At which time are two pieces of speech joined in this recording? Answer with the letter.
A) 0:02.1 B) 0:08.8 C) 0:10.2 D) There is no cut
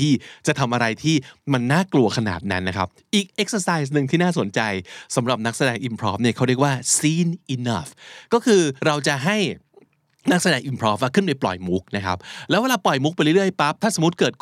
B